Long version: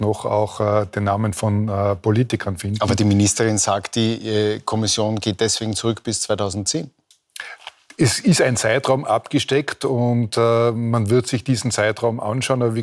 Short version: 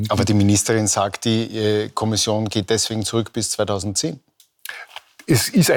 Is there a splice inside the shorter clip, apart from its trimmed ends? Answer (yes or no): no